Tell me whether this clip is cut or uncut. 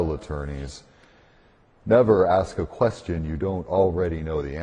uncut